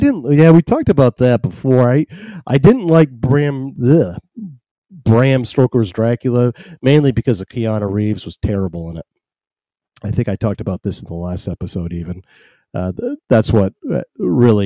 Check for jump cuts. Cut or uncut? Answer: uncut